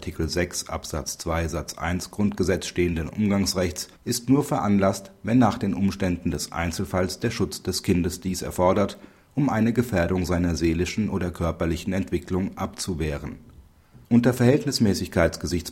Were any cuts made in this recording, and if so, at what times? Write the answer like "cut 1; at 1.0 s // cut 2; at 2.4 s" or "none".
cut 1; at 4.0 s